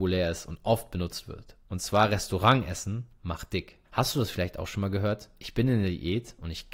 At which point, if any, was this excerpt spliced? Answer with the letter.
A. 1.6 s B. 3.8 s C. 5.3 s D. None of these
B